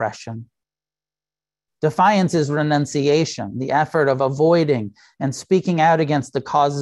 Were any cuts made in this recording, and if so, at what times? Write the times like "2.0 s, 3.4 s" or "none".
1.7 s